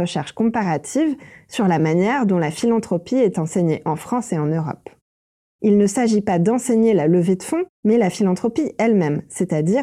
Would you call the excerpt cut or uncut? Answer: cut